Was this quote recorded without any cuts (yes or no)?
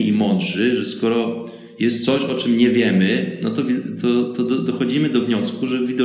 yes